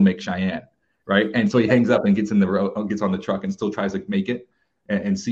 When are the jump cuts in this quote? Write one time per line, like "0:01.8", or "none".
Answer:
none